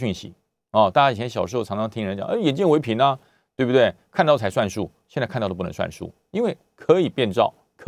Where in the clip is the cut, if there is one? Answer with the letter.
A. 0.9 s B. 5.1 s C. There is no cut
C